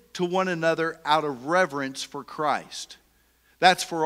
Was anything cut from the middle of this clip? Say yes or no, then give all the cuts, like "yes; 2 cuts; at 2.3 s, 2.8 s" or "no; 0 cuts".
no; 0 cuts